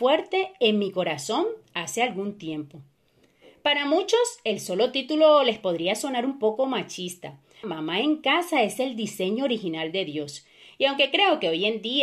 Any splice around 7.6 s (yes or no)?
yes